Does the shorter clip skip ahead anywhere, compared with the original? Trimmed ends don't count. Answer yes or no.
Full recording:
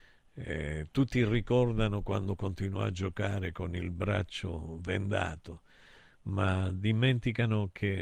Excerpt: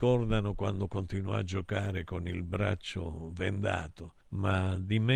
yes